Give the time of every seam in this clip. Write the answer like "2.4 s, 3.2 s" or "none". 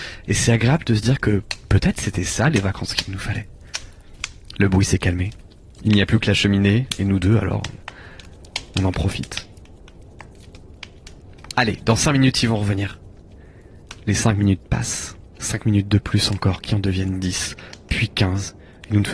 none

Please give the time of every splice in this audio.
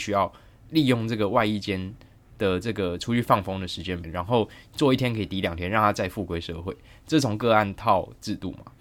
4.0 s

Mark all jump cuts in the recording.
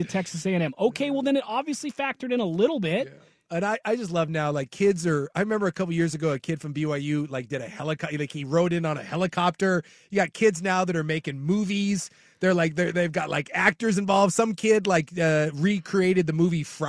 none

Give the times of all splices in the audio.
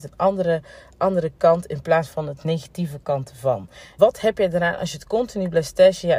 4.0 s

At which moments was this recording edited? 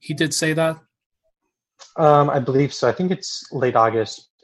none

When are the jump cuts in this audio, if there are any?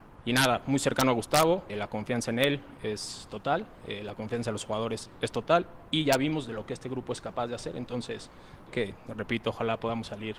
1.7 s, 8.7 s

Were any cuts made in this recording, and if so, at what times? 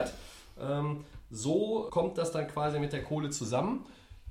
1.9 s

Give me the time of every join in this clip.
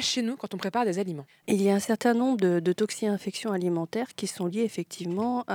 1.4 s

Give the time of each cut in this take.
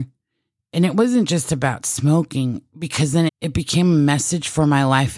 3.3 s

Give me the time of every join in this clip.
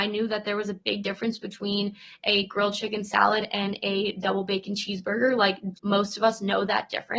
5.7 s

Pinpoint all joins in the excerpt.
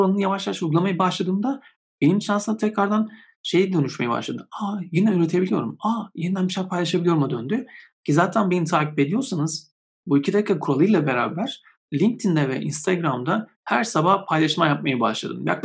none

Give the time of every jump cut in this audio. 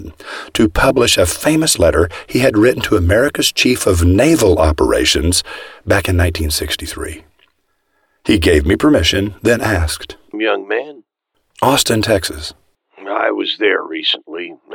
10.3 s

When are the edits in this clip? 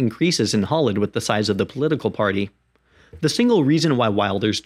none

